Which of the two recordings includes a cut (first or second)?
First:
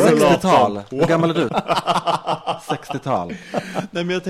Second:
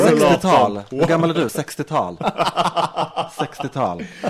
first